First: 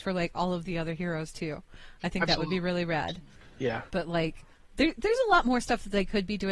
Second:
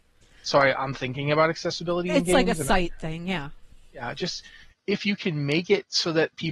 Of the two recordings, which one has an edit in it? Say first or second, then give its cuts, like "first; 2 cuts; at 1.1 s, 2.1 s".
first; 1 cut; at 3.9 s